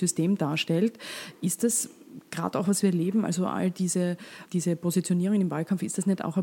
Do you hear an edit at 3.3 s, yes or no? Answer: no